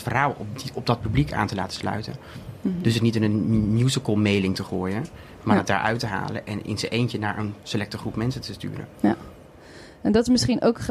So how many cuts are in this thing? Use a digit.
0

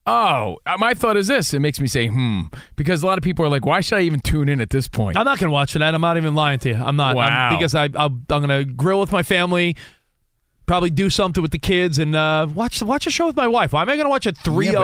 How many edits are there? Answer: 0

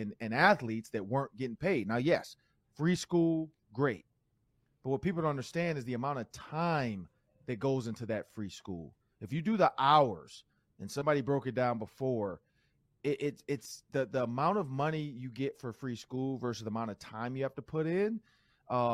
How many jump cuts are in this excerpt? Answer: 0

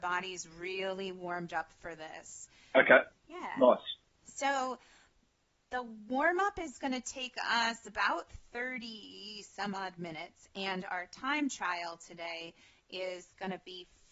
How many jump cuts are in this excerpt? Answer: 1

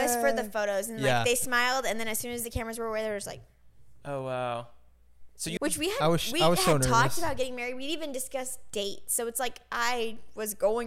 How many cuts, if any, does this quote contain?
1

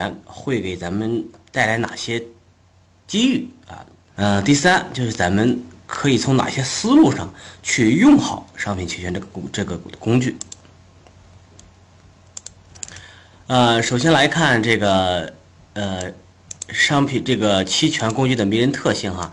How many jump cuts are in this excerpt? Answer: 1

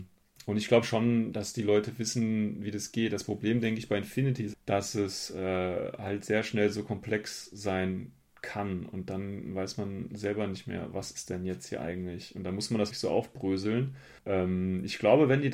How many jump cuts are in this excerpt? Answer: 3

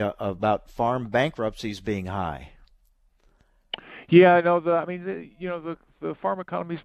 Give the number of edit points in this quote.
0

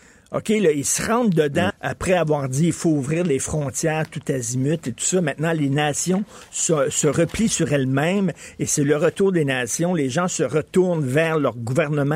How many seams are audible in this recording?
1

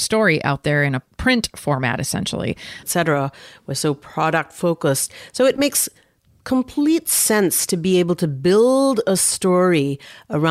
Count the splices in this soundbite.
1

